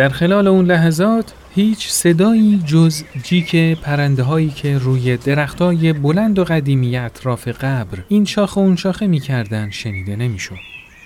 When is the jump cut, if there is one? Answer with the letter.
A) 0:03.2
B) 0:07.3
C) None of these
A